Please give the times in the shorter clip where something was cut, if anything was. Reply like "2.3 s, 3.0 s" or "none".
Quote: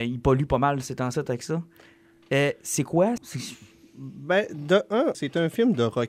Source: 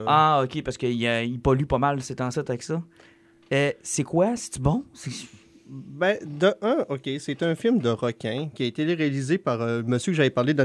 3.2 s, 5.1 s